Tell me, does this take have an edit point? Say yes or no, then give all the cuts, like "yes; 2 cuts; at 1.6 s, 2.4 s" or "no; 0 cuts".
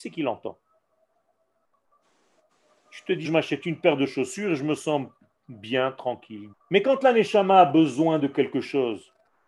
yes; 2 cuts; at 3.2 s, 6.5 s